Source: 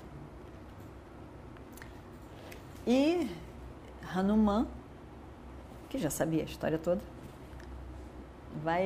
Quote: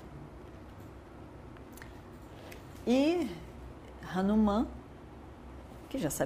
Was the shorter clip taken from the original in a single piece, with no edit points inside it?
yes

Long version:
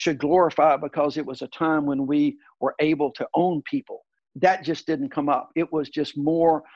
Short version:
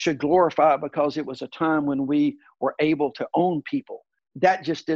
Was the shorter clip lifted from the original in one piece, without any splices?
yes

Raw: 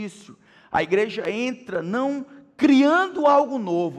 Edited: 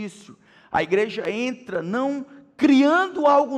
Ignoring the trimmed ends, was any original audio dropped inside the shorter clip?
no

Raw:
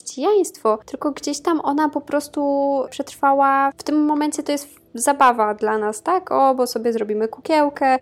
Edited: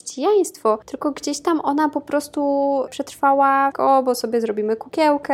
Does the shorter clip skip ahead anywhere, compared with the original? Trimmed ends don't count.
yes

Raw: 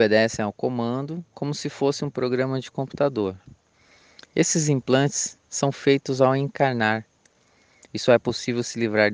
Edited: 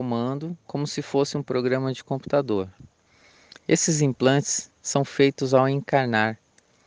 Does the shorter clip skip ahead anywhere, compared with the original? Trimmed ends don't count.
no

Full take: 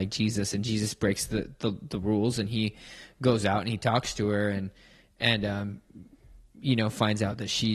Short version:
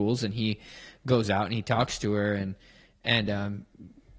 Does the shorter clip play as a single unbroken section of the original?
yes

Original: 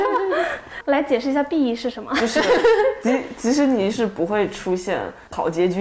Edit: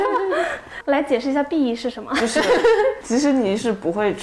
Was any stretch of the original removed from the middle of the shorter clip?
yes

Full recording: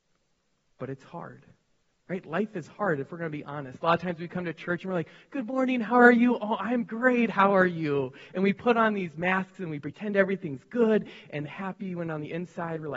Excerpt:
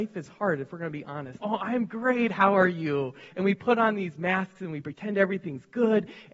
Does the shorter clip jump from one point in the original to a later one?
yes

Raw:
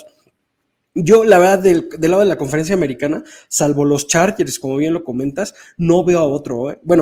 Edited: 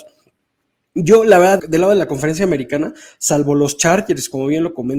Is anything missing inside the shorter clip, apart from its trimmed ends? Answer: yes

